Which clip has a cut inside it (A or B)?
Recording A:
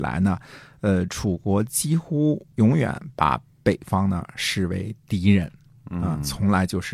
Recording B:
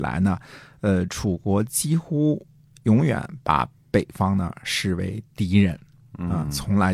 A